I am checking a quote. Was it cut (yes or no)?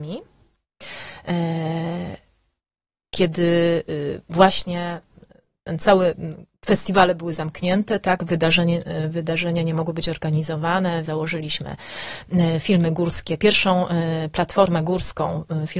yes